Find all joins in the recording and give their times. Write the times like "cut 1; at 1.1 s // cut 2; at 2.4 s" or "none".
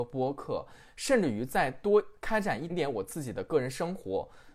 cut 1; at 2.7 s

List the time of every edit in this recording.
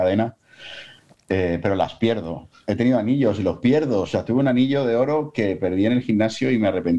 none

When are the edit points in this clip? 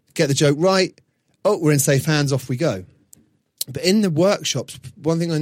none

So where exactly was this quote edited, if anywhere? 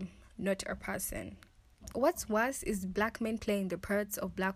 cut 1; at 1.9 s

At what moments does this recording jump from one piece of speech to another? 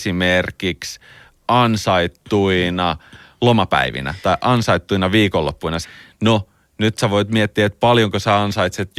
cut 1; at 5.8 s

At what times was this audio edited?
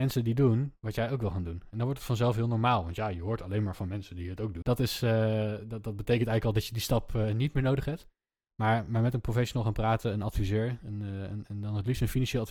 cut 1; at 4.6 s

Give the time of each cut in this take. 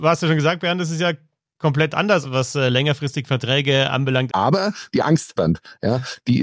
cut 1; at 2.2 s // cut 2; at 4.3 s // cut 3; at 5.4 s

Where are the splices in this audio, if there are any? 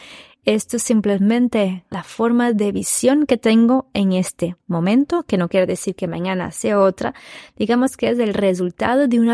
cut 1; at 1.9 s

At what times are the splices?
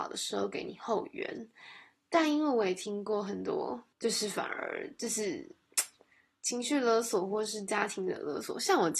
cut 1; at 3.9 s

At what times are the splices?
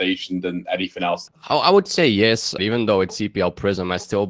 cut 1; at 1.3 s // cut 2; at 2.6 s

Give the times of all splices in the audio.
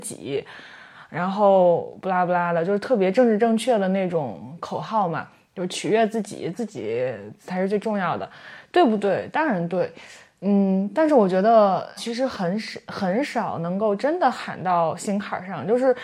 cut 1; at 6.5 s // cut 2; at 12.0 s

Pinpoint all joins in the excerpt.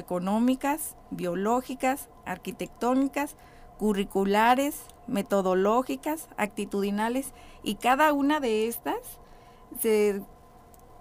none

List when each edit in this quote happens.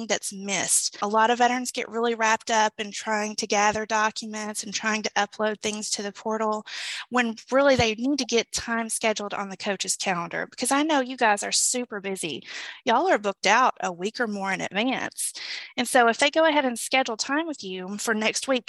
none

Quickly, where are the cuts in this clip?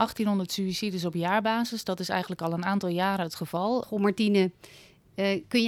cut 1; at 3.8 s

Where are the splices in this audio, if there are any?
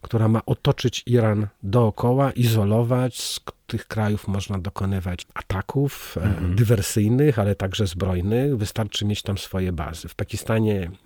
none

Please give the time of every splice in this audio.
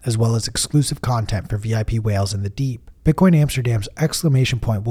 cut 1; at 3.0 s

